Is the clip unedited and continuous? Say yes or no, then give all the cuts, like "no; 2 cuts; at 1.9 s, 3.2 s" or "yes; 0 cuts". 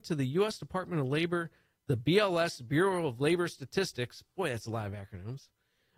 yes; 0 cuts